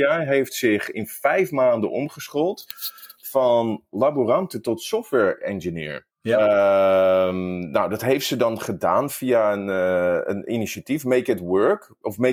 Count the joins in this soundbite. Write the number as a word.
one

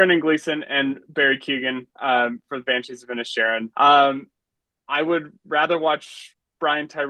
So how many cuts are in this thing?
one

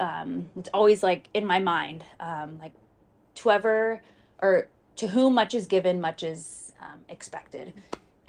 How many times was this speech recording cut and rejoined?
zero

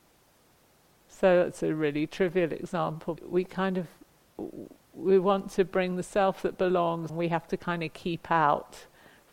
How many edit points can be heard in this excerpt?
two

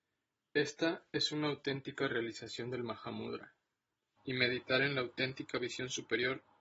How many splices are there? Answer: one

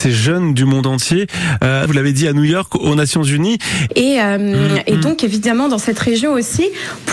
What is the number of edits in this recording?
two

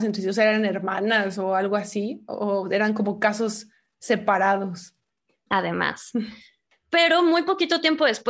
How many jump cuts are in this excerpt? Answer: one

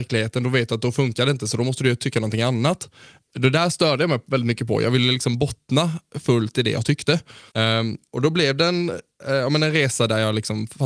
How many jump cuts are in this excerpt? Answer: one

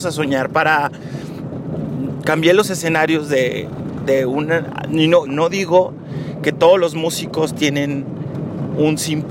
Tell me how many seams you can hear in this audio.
one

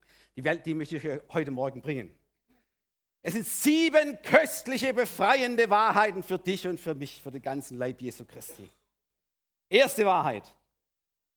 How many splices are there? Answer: zero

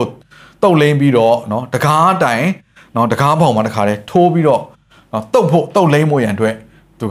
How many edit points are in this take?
zero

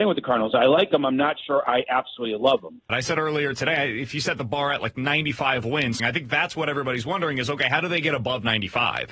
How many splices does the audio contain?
two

